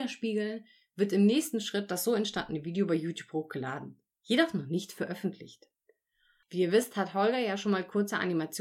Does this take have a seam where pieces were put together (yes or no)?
yes